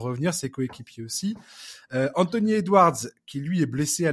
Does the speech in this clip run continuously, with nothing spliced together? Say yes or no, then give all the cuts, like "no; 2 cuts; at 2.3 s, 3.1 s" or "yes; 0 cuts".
yes; 0 cuts